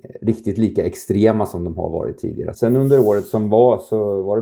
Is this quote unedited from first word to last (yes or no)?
no